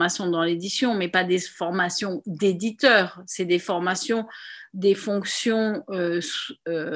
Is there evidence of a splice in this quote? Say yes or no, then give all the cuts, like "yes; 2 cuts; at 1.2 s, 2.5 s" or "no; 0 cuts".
no; 0 cuts